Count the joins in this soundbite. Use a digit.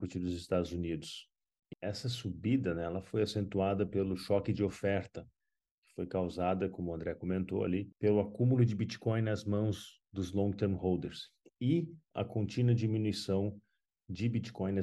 2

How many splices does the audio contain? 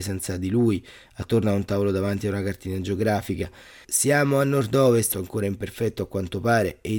2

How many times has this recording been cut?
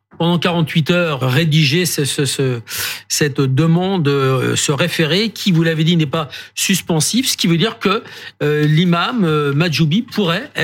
1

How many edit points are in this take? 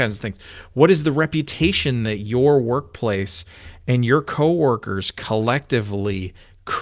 0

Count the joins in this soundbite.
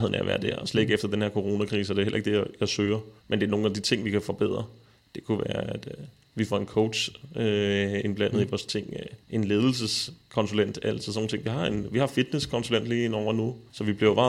1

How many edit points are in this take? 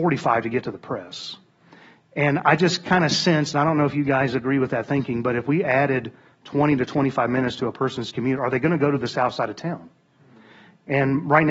0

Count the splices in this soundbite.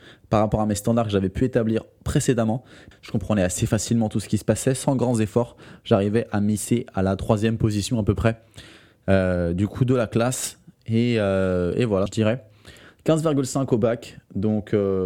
2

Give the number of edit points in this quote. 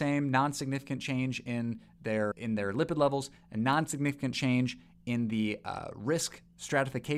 1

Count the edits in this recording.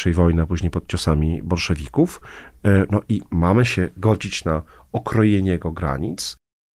0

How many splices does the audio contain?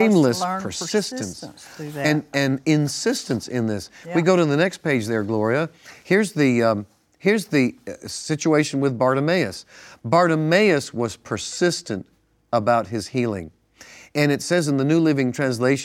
0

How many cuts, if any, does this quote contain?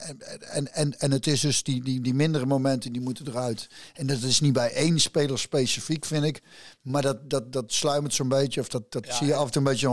0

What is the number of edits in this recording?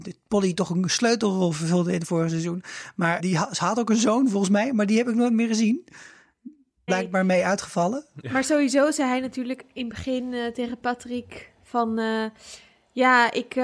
2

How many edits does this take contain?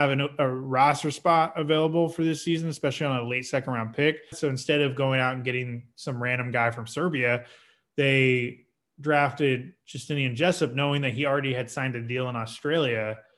1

